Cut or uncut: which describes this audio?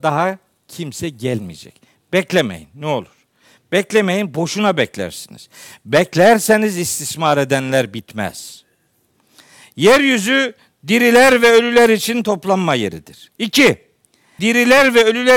cut